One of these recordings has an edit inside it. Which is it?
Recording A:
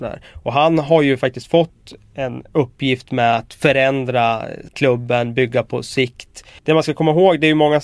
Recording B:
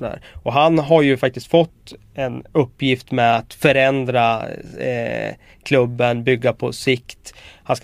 A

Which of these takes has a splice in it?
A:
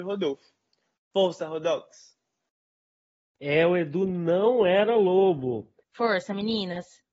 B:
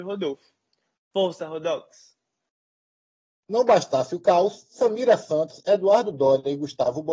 A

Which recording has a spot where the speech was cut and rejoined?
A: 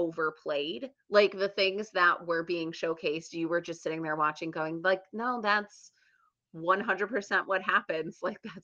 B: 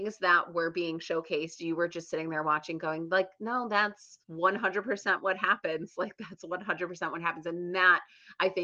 B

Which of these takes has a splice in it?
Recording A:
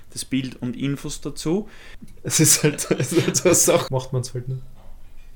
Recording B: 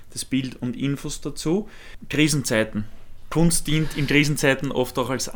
A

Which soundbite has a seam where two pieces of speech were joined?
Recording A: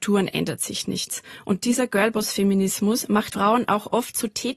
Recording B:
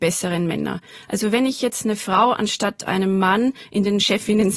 A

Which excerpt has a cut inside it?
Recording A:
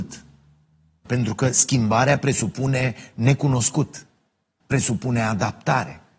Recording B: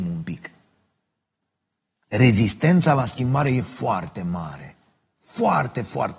A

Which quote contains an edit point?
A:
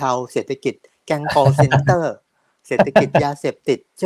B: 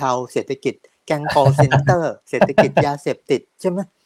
B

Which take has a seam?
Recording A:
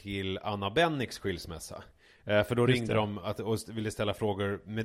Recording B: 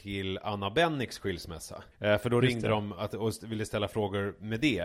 B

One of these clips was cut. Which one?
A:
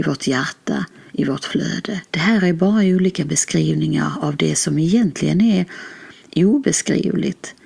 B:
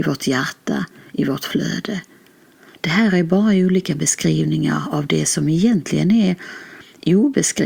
A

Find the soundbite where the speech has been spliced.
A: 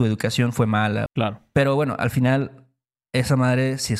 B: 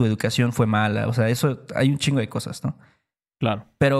A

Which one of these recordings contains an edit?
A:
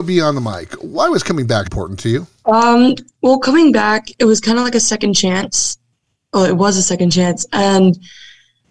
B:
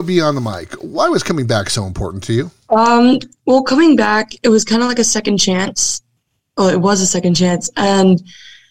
A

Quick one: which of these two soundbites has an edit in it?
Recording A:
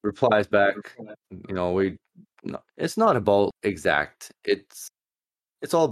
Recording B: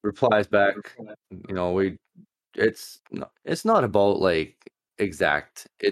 A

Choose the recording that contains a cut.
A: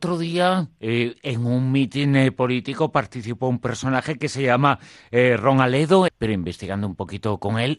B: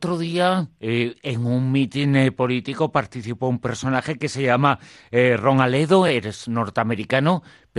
A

